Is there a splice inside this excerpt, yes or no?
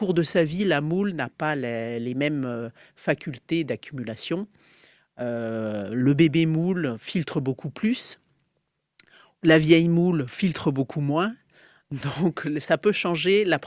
no